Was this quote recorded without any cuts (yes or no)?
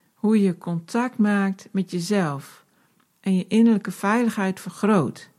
yes